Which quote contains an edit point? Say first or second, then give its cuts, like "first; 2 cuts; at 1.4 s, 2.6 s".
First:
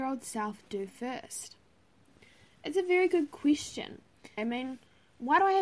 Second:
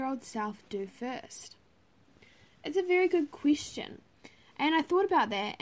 first; 1 cut; at 4.4 s